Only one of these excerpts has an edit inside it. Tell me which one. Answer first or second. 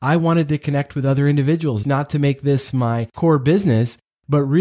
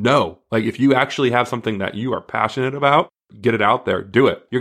first